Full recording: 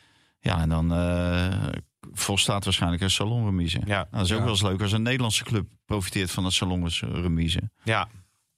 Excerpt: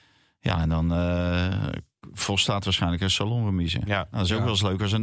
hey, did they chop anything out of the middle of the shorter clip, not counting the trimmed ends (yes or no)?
no